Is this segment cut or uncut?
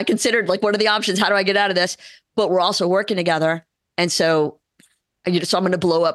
uncut